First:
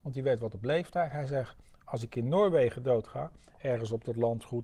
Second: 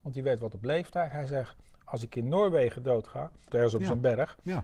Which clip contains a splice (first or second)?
second